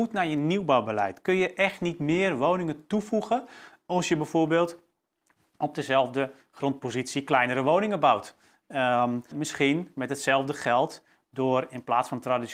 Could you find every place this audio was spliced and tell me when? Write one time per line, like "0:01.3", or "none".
0:09.3